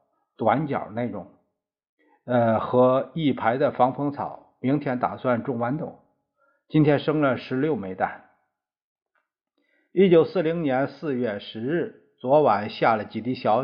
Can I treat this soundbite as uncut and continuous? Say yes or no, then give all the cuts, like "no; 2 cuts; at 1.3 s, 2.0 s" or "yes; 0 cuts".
yes; 0 cuts